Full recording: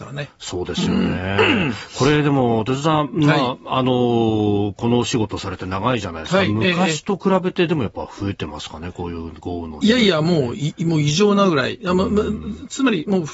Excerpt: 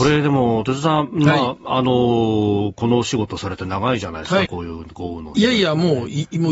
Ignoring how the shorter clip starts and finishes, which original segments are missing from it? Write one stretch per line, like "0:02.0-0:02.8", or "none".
0:06.5-0:08.9